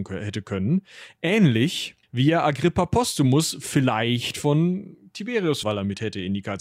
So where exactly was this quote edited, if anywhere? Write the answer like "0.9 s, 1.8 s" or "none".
2.0 s, 5.6 s